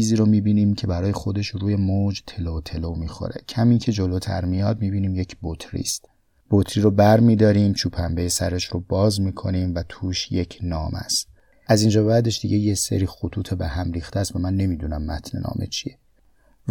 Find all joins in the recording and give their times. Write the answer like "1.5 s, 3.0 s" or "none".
none